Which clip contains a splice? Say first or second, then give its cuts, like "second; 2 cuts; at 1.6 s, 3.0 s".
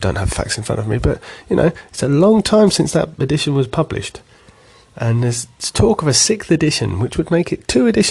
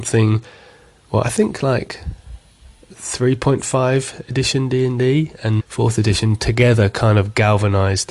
second; 2 cuts; at 2.9 s, 5.6 s